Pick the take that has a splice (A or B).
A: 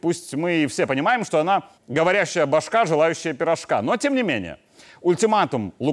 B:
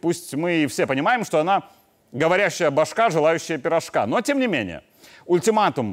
A